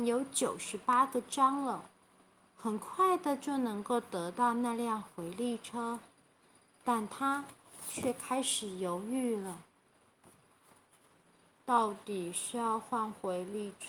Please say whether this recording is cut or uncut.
uncut